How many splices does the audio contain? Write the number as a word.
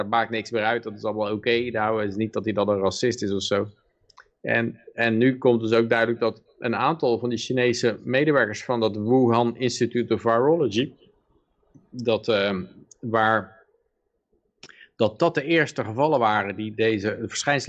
zero